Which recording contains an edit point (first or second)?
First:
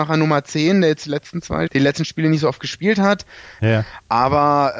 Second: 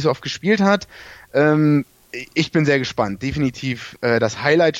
first